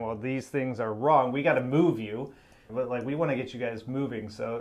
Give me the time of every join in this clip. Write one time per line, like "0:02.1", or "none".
0:02.7